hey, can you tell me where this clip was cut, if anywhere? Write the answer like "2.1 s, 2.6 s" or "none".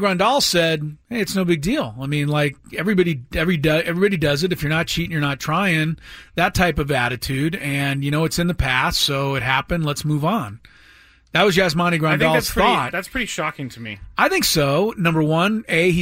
1.0 s